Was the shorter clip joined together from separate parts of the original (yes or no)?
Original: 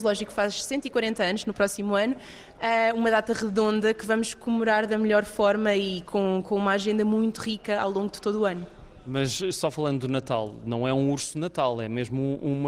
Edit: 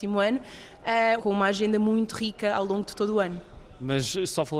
yes